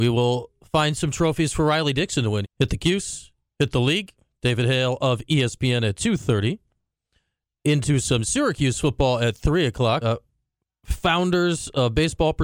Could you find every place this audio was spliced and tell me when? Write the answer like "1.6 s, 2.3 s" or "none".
2.4 s, 10.0 s